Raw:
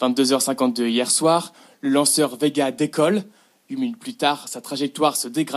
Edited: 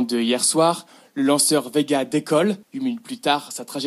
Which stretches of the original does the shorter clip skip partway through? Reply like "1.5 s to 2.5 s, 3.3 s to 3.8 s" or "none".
3.3 s to 3.6 s